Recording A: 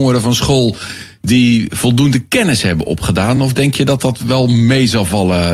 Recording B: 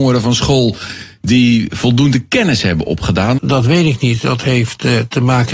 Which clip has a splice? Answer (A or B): B